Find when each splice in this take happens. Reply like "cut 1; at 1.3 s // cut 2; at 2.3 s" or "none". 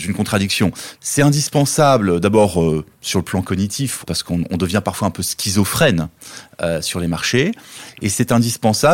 cut 1; at 0.9 s // cut 2; at 4.0 s

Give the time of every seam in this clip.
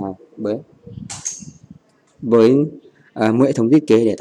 none

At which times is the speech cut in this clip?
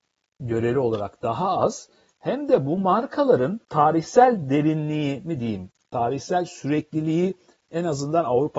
cut 1; at 3.6 s

